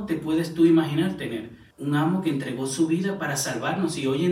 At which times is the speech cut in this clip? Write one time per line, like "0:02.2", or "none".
0:01.7